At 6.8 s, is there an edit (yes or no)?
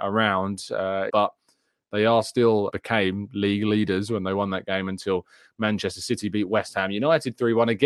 no